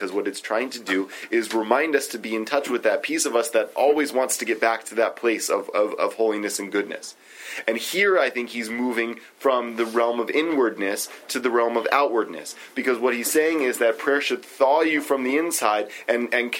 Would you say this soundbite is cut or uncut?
uncut